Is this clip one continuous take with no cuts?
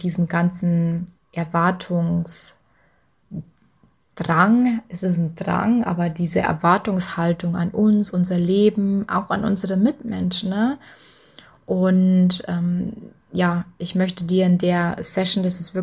yes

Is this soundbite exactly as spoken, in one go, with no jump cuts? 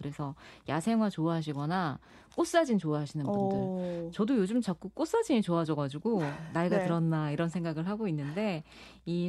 yes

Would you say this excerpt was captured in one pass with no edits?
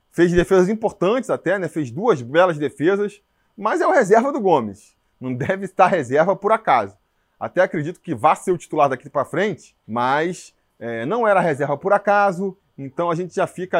no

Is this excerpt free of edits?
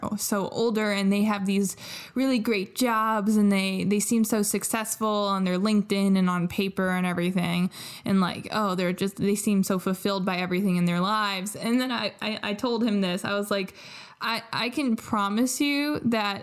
yes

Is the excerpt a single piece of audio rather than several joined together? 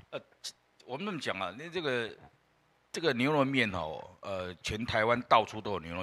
yes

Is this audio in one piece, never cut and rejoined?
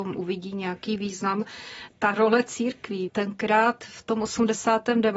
no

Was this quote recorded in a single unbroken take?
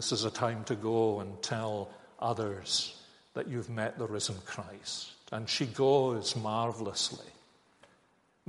yes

